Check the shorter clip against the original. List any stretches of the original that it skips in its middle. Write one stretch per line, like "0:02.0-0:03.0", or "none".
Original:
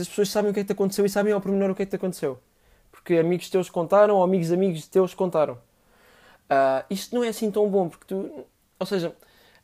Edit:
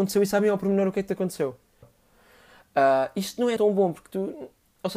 0:02.7-0:05.6
0:07.3-0:07.5

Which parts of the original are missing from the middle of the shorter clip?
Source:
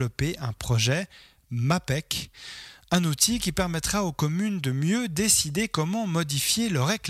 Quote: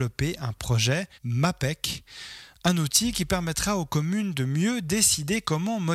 0:01.1-0:01.4

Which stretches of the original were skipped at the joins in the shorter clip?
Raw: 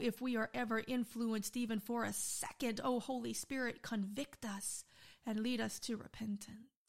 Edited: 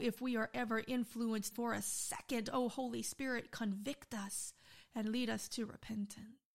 0:01.5-0:01.8

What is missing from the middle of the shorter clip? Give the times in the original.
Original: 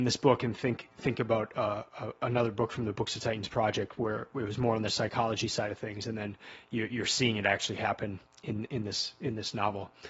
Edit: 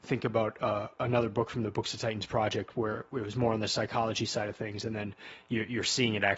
0:01.9-0:02.2

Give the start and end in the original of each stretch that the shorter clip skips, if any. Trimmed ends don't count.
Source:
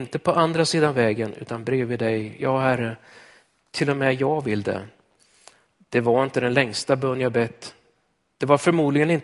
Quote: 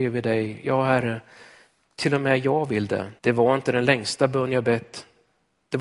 0:04.9-0:05.9

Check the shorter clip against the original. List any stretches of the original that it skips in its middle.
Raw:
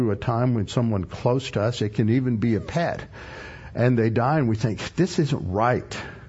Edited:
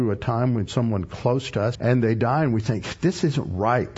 0:01.7-0:03.7

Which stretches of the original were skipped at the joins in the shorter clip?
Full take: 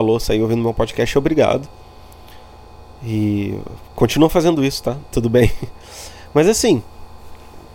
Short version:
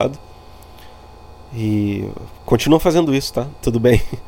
none

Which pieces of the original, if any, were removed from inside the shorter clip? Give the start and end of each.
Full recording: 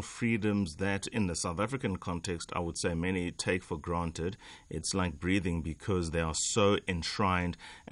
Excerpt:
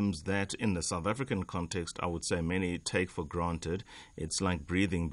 none

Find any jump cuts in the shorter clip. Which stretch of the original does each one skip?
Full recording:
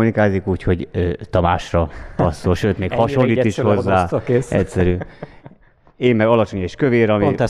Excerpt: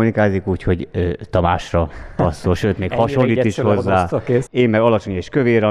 0:04.5-0:05.9

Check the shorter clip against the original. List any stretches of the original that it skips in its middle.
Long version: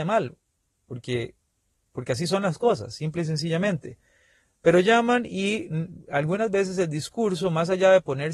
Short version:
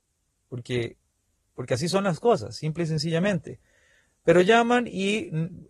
none

